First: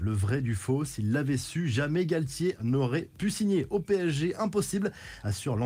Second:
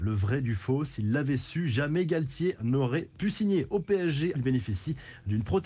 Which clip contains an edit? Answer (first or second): second